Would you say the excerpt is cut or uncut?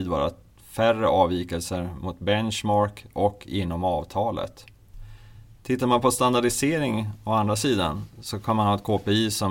uncut